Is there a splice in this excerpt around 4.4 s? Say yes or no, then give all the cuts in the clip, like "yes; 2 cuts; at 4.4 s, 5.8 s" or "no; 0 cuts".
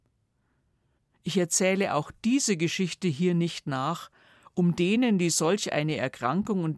no; 0 cuts